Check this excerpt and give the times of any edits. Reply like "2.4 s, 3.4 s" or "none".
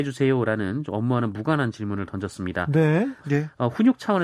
3.2 s